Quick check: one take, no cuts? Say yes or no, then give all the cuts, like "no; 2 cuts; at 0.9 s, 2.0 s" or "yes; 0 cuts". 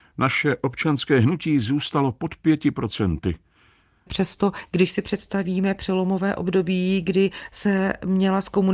no; 1 cut; at 4.1 s